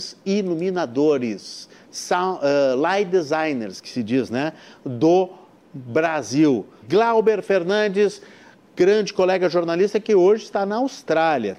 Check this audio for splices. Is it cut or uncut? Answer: cut